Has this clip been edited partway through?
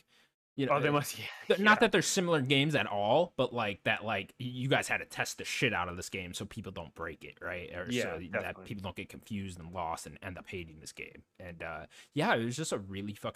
no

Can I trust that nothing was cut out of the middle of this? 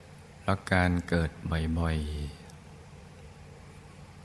yes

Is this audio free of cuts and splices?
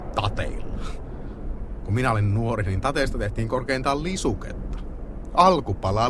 yes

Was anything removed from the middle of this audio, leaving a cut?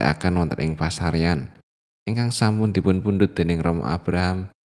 no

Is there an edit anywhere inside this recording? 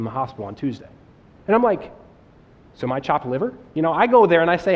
yes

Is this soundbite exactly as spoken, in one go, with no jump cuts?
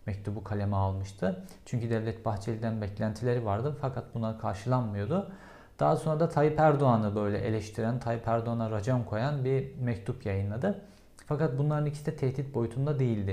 yes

